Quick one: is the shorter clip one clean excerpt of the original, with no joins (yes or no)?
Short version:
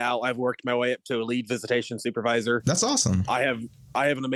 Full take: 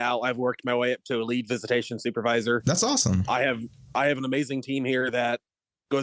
yes